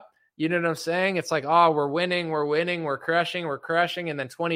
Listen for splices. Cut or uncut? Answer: uncut